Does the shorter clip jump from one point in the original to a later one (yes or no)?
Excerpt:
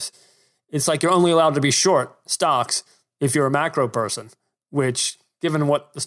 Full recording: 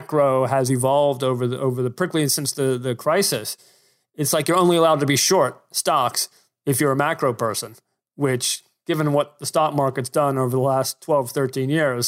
no